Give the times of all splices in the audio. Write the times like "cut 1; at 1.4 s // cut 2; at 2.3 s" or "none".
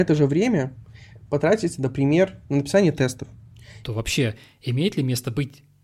cut 1; at 3.8 s